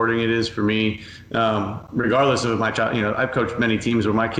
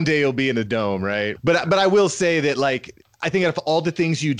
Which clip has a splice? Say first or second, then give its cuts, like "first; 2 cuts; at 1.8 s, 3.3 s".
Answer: second; 1 cut; at 1.4 s